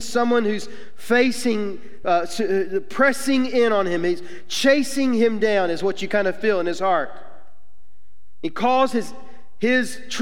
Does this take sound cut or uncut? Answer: uncut